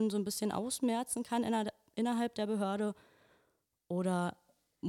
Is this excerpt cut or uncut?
uncut